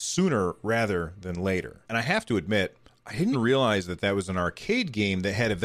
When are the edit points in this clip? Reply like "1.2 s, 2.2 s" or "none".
1.8 s, 3.3 s